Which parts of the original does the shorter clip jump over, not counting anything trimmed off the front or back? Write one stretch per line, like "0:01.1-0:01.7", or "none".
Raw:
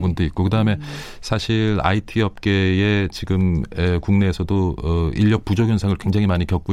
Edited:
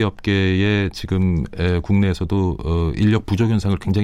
none

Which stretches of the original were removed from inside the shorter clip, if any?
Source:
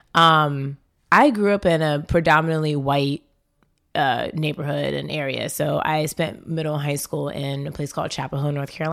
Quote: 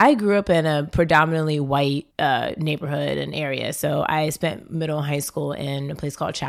0:03.3-0:03.9

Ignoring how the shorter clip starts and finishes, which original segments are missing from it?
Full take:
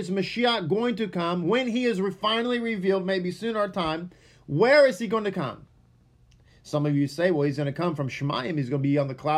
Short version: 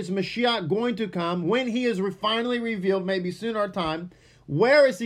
none

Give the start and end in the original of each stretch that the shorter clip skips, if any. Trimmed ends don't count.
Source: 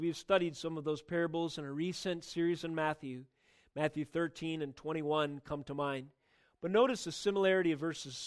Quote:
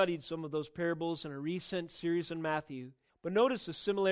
0:03.4-0:06.5

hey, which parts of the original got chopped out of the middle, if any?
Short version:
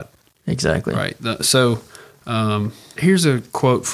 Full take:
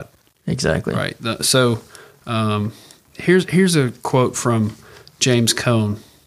0:03.0-0:03.5

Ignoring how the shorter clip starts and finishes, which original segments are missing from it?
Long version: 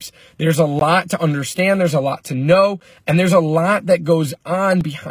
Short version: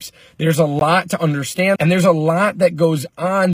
0:01.8-0:03.0

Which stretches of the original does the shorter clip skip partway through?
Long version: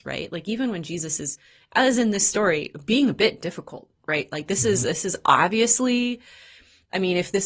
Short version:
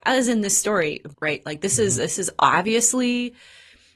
0:02.8-0:04.0

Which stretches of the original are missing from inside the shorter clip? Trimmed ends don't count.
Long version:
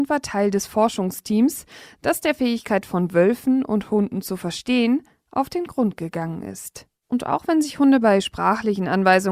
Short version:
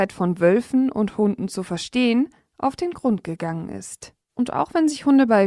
none

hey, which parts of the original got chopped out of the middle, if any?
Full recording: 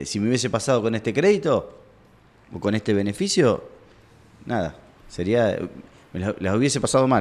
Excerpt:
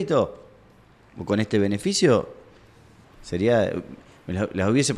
0:04.4-0:04.9

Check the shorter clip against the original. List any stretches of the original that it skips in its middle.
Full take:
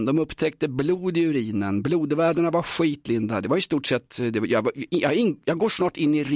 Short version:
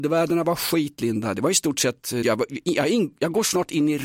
0:04.3-0:04.5

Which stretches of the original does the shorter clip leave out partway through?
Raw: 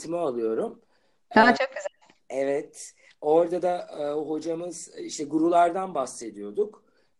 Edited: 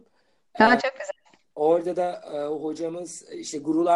0:02.3-0:03.2

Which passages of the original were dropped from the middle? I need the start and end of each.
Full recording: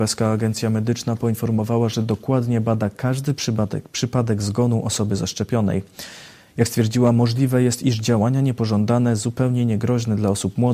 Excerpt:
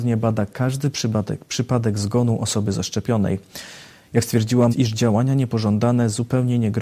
0:07.1-0:07.8

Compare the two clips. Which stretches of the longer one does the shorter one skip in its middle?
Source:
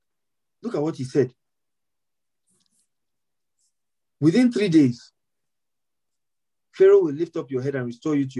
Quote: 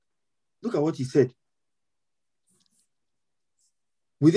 none

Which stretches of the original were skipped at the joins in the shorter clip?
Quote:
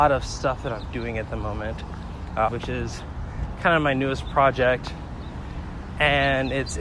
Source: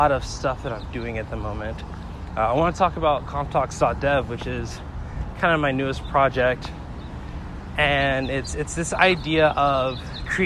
0:02.5-0:04.3

